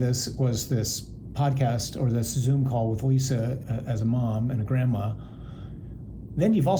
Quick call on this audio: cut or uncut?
cut